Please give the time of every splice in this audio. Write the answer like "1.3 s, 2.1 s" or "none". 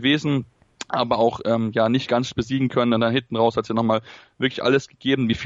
none